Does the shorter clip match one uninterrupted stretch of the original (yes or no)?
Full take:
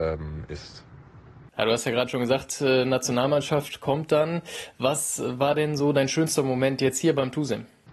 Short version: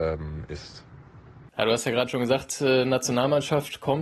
yes